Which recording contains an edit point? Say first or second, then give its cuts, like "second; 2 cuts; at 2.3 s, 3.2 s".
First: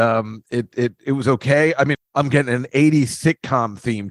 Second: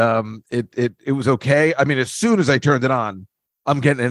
first; 1 cut; at 1.9 s